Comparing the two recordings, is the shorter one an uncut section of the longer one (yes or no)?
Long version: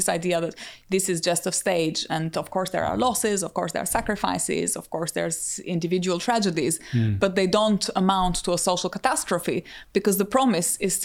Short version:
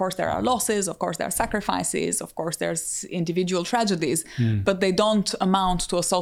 yes